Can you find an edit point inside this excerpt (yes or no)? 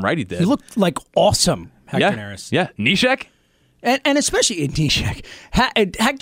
no